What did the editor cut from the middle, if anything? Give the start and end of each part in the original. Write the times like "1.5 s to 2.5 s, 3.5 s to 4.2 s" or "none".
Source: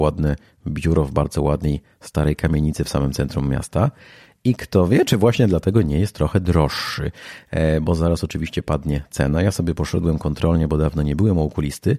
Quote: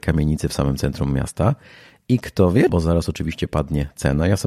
5.0 s to 7.8 s